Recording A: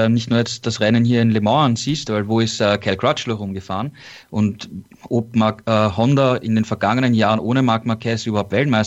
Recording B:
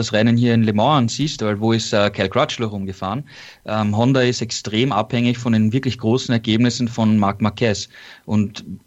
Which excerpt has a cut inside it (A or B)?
A